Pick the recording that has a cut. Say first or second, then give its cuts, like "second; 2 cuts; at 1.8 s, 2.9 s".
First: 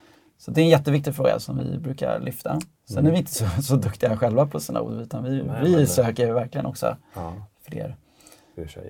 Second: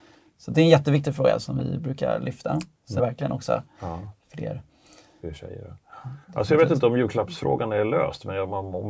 second; 2 cuts; at 3.0 s, 6.2 s